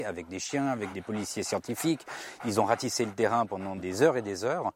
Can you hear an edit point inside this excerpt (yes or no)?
no